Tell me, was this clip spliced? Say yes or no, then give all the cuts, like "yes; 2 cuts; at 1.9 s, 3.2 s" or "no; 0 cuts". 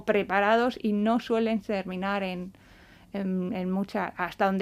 no; 0 cuts